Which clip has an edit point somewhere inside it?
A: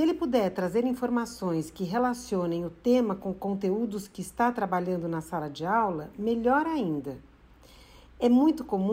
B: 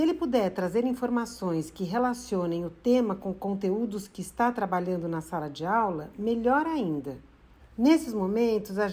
B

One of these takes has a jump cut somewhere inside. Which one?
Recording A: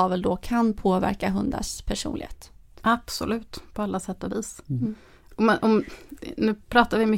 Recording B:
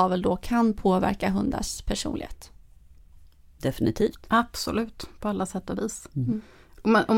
A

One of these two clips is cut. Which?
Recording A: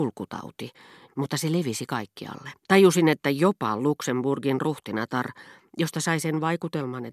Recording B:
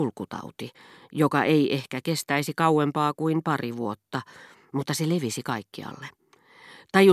A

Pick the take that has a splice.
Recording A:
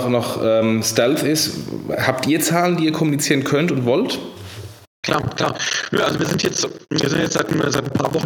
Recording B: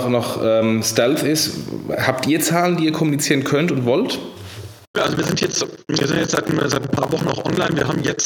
B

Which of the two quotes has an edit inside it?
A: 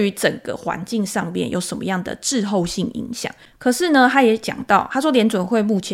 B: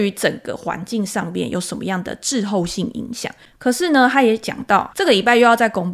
B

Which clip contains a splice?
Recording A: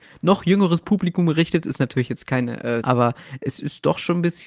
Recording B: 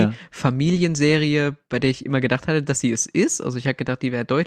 A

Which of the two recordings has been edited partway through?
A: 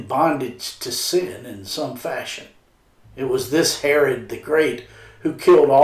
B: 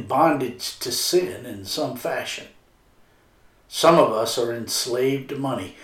A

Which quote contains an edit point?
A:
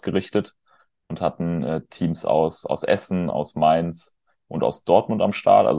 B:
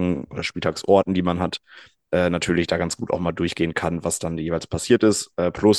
A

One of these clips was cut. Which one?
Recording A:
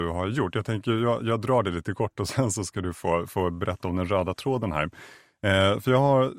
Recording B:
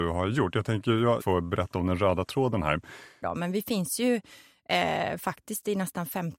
B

